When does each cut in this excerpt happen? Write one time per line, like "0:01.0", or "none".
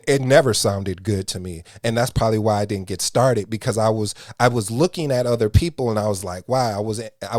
none